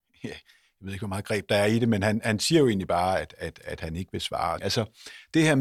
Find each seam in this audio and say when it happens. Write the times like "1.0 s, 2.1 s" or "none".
4.6 s